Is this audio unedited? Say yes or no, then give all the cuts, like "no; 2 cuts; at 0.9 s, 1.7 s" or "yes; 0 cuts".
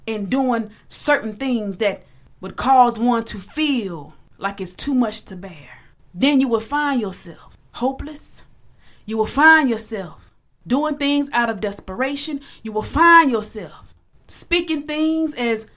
yes; 0 cuts